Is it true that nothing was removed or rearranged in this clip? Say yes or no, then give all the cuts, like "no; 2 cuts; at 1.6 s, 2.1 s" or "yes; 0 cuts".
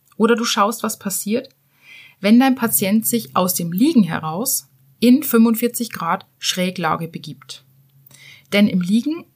yes; 0 cuts